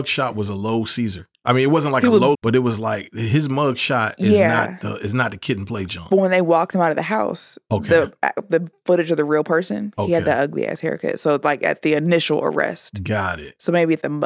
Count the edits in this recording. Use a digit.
1